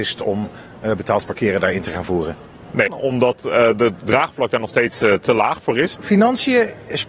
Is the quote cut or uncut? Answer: cut